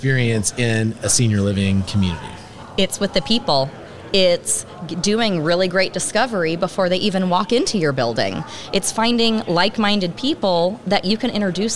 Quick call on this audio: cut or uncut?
uncut